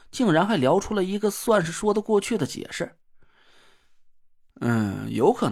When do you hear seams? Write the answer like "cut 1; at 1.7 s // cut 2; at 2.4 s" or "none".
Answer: none

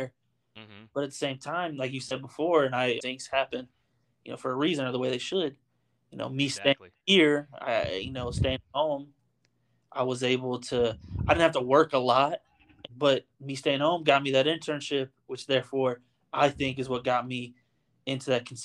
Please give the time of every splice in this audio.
cut 1; at 3.0 s // cut 2; at 12.9 s

